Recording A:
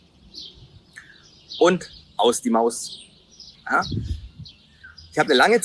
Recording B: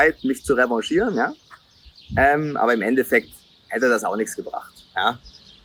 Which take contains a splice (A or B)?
A